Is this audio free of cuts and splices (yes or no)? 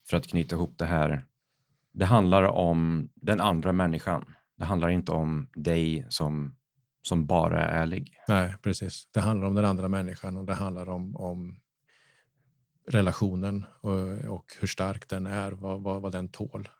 yes